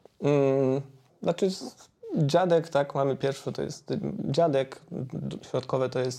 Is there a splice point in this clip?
yes; 1 cut; at 1.1 s

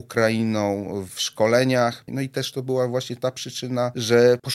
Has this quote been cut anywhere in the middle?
yes; 1 cut; at 2.1 s

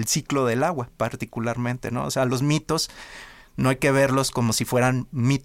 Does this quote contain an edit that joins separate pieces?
no; 0 cuts

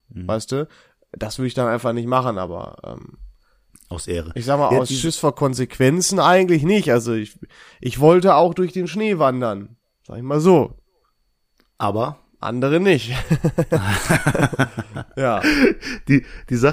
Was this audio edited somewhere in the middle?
no; 0 cuts

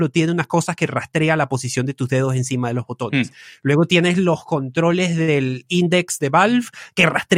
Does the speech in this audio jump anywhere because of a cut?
no; 0 cuts

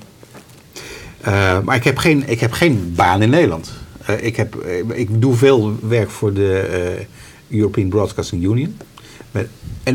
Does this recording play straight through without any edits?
yes; 0 cuts

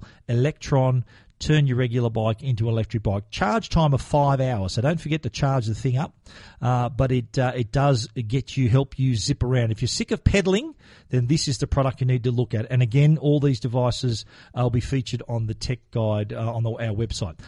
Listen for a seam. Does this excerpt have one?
no; 0 cuts

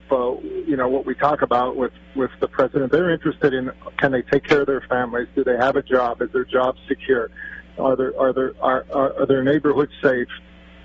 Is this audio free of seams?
yes; 0 cuts

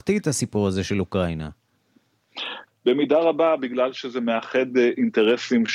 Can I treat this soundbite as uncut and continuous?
no; 1 cut; at 2.7 s

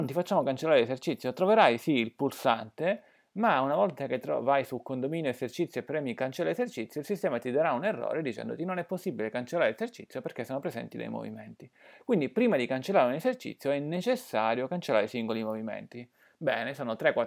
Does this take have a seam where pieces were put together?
no; 0 cuts

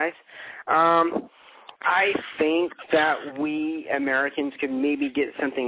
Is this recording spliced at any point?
yes; 1 cut; at 1.7 s

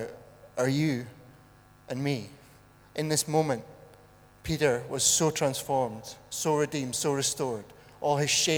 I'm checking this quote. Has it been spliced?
no; 0 cuts

